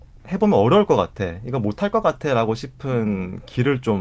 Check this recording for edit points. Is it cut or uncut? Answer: uncut